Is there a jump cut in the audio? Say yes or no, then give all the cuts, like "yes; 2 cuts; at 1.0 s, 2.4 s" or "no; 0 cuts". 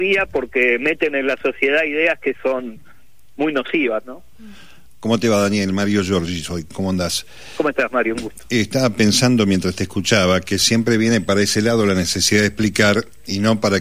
no; 0 cuts